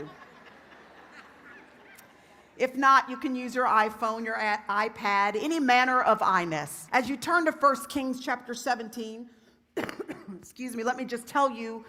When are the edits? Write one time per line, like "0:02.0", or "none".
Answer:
0:06.9